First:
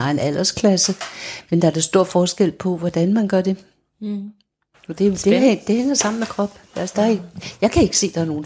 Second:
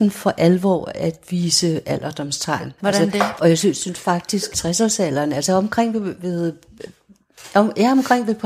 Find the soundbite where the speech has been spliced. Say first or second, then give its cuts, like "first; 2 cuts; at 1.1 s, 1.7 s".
second; 2 cuts; at 3.4 s, 4.5 s